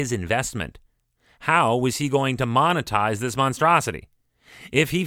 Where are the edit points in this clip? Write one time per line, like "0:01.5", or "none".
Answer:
none